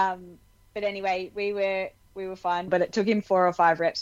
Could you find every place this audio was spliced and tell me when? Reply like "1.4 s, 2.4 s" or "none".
2.7 s